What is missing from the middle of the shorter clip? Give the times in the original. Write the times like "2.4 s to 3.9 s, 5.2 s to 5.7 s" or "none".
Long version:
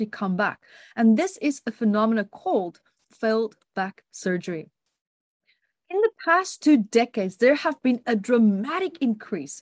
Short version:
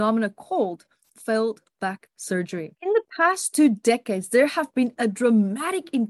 4.7 s to 5.8 s